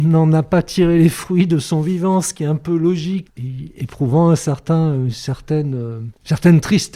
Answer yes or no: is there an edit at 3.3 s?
yes